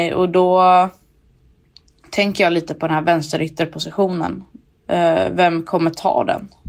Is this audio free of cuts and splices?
no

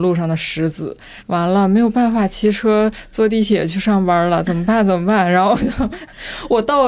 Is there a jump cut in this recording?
no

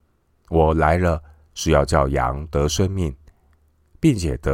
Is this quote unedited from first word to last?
yes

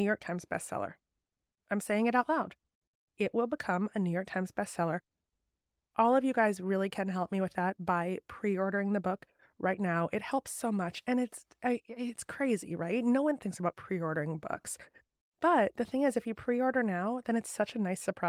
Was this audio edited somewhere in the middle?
no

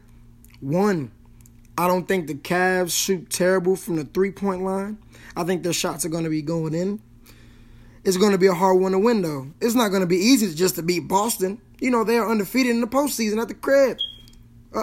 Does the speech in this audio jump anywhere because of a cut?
no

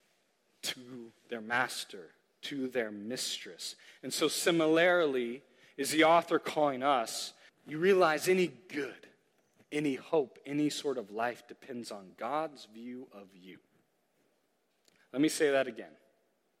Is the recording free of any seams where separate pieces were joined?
no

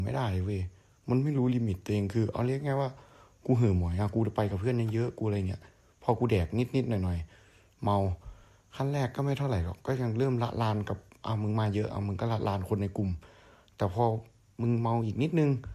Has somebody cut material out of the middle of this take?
no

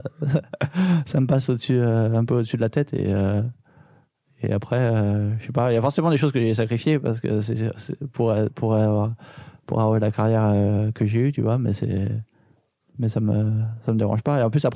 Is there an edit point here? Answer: no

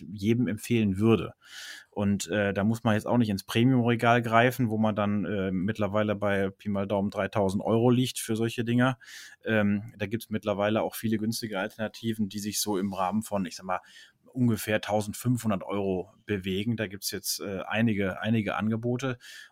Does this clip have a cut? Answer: no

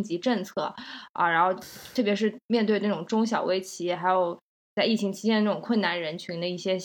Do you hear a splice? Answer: no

